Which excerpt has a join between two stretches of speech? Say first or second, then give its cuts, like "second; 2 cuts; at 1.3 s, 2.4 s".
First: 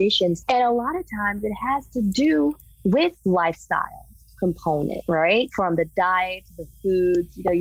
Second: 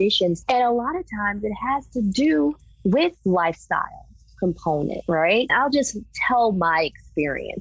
second; 1 cut; at 5.5 s